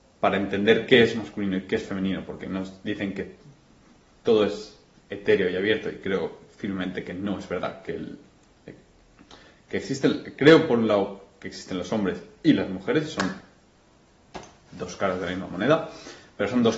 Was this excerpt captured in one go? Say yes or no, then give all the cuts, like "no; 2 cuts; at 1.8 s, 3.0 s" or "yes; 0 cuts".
yes; 0 cuts